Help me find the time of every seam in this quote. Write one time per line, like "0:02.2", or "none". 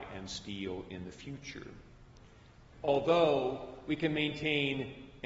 0:02.7